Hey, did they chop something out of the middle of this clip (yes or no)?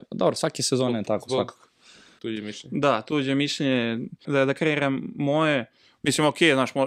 yes